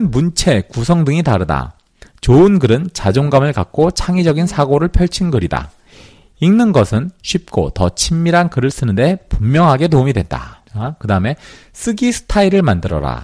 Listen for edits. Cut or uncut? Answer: cut